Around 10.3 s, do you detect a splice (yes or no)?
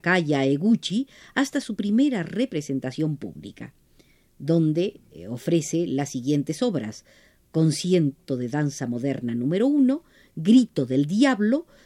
no